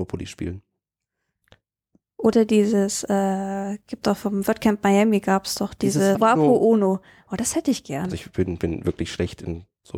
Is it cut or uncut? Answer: cut